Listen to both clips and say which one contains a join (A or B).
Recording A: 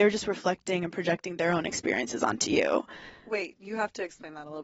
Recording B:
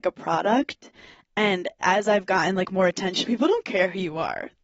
B